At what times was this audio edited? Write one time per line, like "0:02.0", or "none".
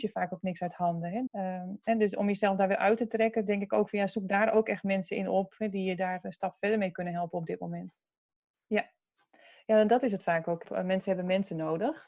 0:01.3
0:08.5
0:10.6